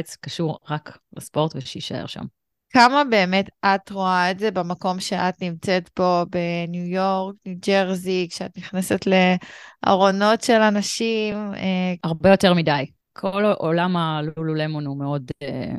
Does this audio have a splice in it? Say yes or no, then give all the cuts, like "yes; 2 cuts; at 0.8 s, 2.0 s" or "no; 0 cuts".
no; 0 cuts